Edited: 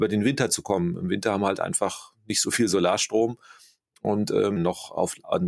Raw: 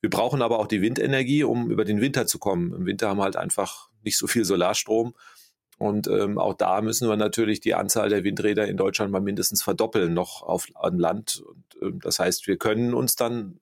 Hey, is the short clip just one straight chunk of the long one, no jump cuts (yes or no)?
no